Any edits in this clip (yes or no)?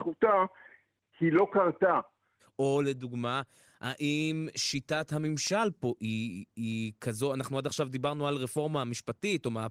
yes